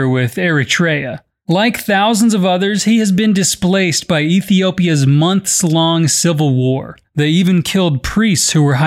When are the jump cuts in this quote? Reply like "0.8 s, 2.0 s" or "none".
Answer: 7.0 s

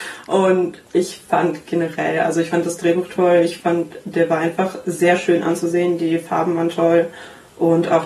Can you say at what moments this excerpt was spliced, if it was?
none

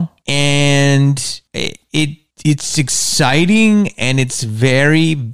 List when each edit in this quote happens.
none

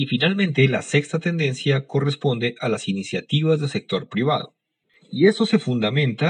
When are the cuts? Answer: 4.9 s

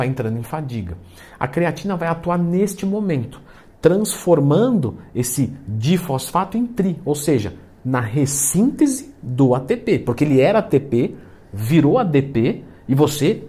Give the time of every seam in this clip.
none

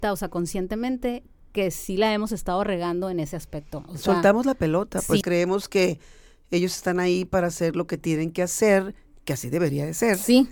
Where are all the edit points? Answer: 5.2 s

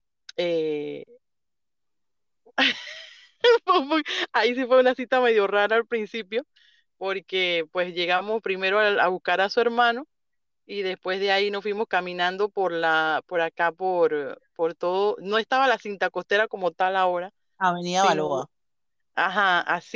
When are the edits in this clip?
none

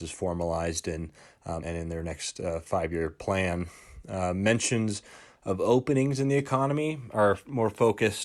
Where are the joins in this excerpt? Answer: 1.6 s

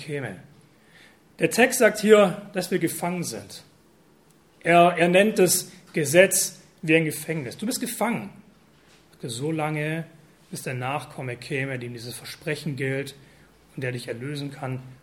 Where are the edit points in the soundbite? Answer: none

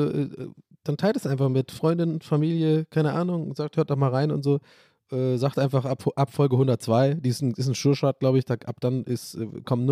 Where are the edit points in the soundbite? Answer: none

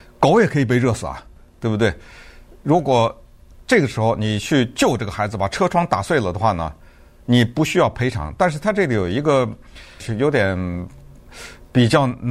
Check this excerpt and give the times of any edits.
10.0 s

